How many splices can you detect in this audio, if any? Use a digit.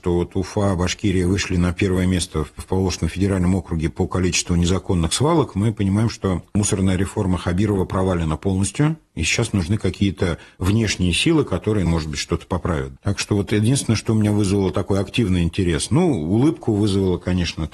1